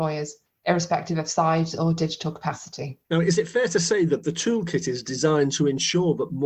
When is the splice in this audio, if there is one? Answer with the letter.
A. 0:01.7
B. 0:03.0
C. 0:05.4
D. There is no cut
B